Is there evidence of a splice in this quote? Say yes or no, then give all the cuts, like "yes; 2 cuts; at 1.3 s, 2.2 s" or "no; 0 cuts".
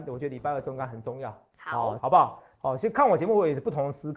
yes; 1 cut; at 2.0 s